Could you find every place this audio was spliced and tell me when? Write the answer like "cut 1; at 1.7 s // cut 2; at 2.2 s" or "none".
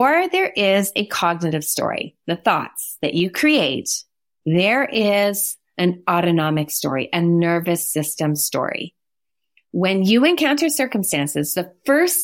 none